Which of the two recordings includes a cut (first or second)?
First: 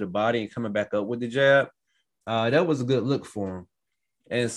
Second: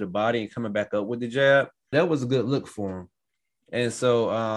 second